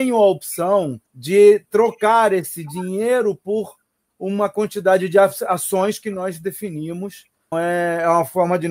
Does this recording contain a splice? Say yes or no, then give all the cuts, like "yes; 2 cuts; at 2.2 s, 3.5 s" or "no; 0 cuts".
yes; 2 cuts; at 1.1 s, 7.5 s